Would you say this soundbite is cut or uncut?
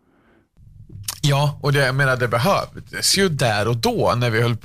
uncut